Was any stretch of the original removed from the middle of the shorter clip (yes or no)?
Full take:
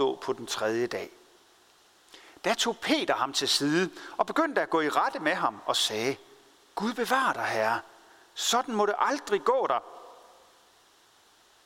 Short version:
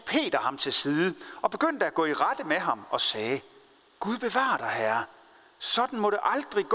no